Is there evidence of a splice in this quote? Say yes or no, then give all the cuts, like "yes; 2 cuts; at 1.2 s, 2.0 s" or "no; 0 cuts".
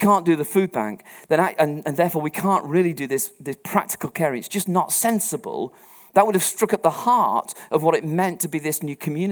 no; 0 cuts